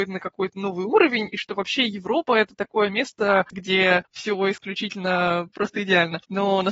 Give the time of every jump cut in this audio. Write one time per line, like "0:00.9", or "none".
none